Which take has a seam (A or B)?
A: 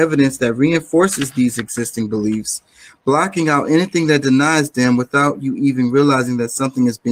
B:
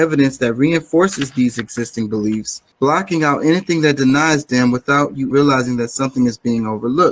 B